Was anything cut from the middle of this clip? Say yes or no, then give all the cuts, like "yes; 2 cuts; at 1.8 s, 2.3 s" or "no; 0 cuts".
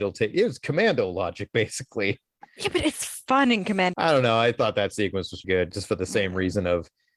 yes; 2 cuts; at 3.9 s, 5.4 s